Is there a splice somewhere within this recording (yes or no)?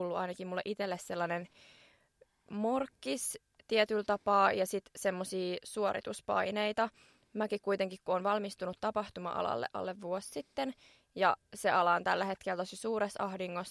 no